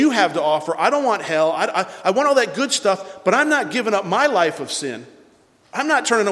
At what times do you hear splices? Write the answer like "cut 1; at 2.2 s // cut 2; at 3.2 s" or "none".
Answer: none